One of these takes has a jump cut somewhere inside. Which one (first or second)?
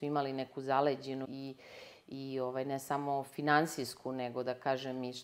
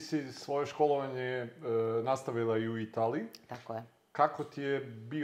first